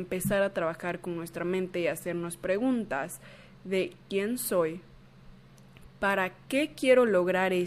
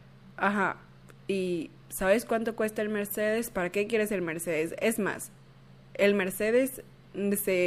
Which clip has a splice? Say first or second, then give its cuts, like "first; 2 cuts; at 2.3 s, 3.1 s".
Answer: first; 1 cut; at 5.8 s